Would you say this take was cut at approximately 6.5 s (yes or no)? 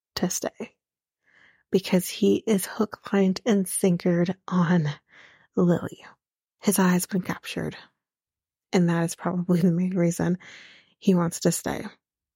yes